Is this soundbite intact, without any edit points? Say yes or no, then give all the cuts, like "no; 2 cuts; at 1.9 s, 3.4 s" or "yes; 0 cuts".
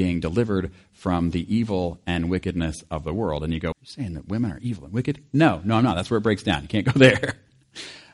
no; 1 cut; at 3.7 s